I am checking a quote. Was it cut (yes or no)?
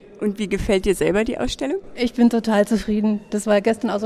no